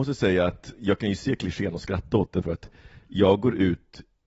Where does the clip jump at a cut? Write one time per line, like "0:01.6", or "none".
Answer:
0:02.4